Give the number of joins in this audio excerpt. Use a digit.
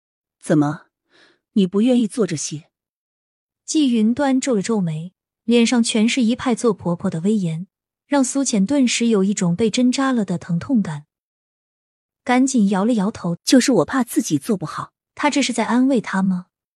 2